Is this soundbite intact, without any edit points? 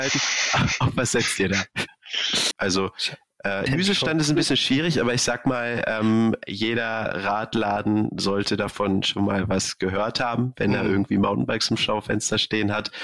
no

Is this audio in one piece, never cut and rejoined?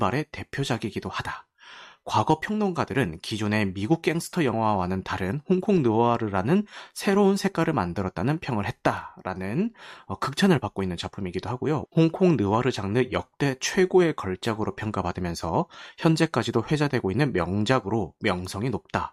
no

